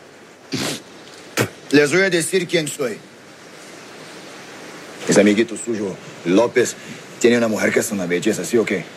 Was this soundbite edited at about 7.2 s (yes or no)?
no